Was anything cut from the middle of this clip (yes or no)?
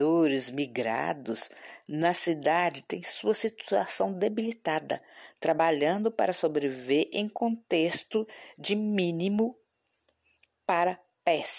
no